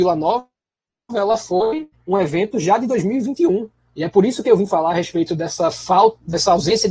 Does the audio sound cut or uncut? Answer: uncut